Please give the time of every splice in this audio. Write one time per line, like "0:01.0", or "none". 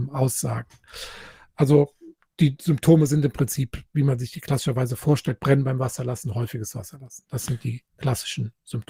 none